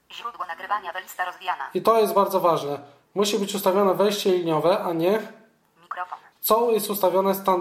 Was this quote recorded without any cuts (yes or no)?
no